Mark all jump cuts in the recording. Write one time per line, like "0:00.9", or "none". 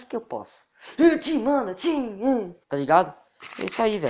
0:02.6